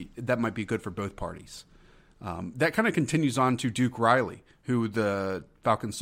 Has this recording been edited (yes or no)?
no